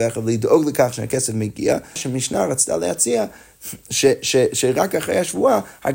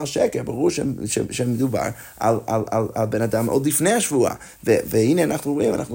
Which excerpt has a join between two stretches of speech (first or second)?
first